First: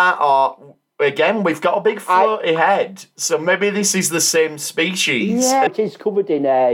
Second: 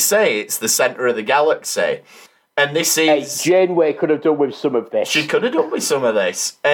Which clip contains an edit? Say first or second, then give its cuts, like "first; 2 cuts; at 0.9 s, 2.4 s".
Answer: first; 1 cut; at 5.7 s